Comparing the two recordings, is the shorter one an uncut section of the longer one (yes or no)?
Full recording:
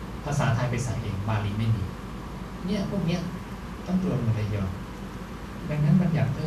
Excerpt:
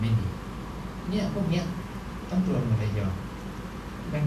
yes